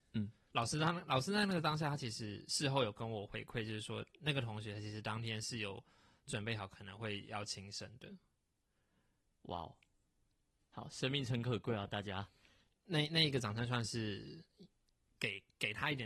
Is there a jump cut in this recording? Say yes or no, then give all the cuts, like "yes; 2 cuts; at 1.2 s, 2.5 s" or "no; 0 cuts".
no; 0 cuts